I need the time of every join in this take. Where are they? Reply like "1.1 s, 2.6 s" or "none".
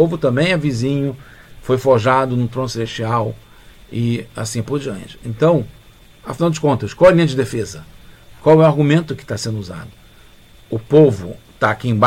none